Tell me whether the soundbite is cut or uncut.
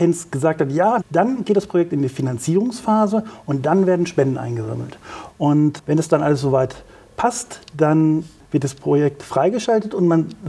cut